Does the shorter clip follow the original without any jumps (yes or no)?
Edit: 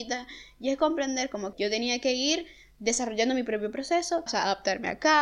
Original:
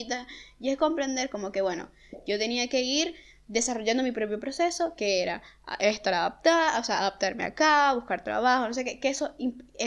no